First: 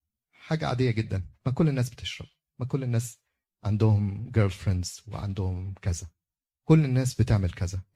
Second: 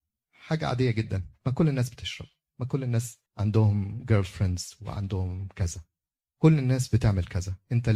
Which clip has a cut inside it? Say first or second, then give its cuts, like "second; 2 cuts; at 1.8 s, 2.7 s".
second; 1 cut; at 3.3 s